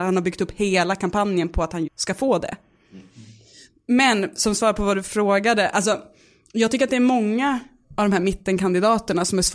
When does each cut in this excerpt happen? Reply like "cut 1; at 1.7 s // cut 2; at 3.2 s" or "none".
cut 1; at 1.9 s